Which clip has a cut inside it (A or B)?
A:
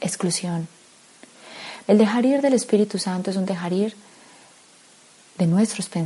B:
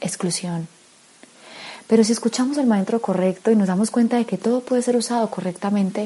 A